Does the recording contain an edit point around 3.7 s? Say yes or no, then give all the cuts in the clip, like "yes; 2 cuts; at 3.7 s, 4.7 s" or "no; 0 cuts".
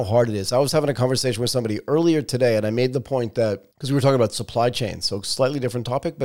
yes; 1 cut; at 3.7 s